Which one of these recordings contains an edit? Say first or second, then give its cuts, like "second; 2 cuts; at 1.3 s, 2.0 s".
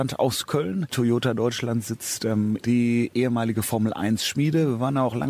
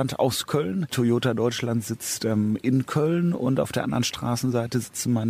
first; 1 cut; at 2.6 s